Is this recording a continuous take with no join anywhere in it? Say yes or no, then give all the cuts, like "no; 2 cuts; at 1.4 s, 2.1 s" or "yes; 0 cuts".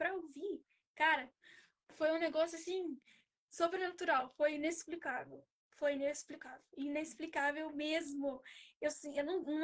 yes; 0 cuts